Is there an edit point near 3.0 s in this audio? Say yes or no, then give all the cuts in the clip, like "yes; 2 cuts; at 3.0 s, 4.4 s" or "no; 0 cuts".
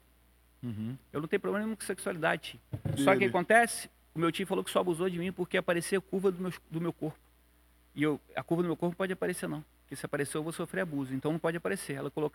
yes; 1 cut; at 3.0 s